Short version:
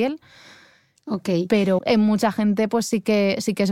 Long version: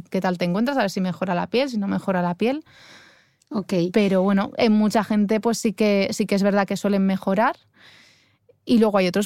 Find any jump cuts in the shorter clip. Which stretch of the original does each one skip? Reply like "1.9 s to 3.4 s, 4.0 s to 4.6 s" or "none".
4.2 s to 4.5 s